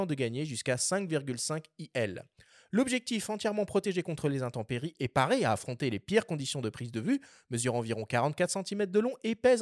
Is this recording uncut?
yes; 0 cuts

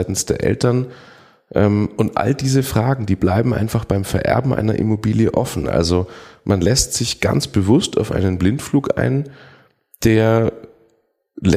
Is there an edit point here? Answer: no; 0 cuts

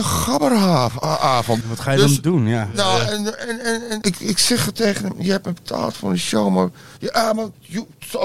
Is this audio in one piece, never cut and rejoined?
no; 2 cuts; at 1.6 s, 4.0 s

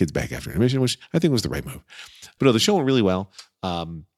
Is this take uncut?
no; 1 cut; at 2.4 s

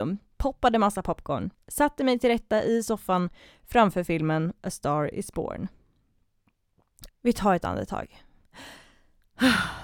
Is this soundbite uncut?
no; 2 cuts; at 1.5 s, 7.1 s

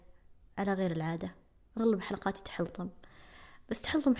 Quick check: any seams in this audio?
no; 0 cuts

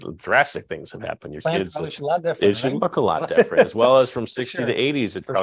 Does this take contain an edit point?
yes; 1 cut; at 2.0 s

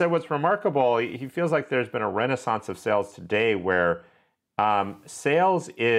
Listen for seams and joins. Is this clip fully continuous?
yes; 0 cuts

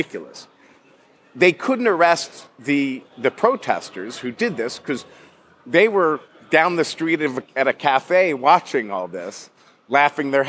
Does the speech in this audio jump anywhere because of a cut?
no; 0 cuts

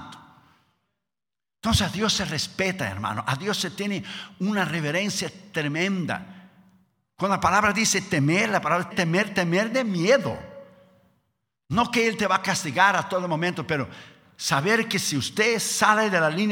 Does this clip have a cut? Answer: yes; 1 cut; at 8.9 s

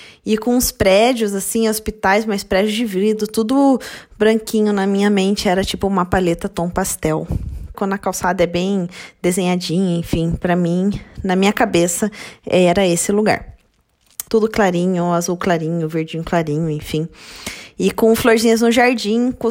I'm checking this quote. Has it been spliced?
yes; 2 cuts; at 7.7 s, 14.3 s

